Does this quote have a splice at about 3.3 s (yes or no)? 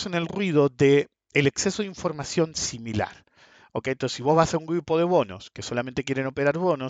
no